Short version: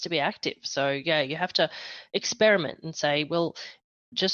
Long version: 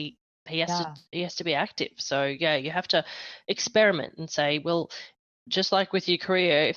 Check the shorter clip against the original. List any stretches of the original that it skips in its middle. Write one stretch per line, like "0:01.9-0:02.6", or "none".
none